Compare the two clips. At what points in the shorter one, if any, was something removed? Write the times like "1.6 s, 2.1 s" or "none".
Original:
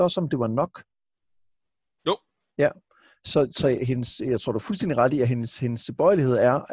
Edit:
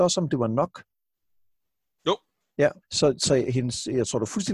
2.8 s